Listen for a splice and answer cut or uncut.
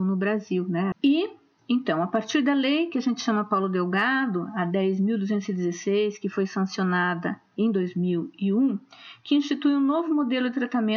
cut